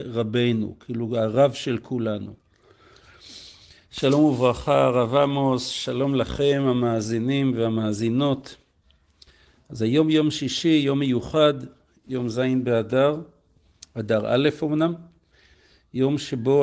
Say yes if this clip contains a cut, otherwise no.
yes